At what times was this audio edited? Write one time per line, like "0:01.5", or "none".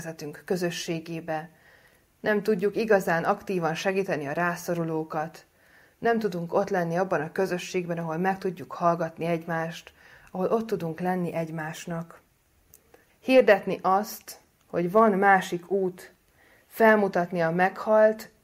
0:13.1